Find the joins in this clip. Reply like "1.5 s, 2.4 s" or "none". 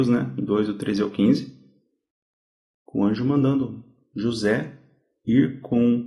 none